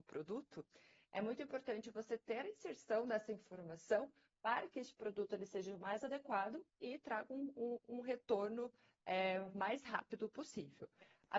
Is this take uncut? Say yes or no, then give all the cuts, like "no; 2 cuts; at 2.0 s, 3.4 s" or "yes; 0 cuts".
yes; 0 cuts